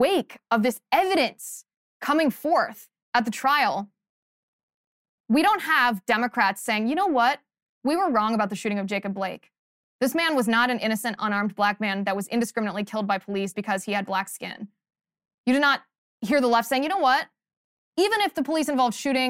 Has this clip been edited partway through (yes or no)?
yes